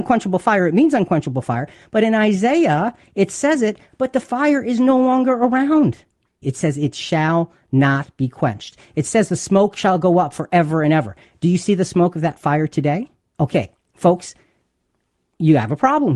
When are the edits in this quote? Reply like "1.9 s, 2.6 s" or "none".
6.4 s, 13.2 s